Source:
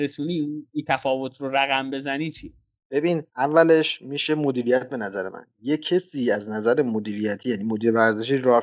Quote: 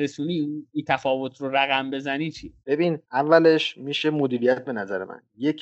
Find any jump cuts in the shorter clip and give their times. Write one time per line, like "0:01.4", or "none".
0:02.6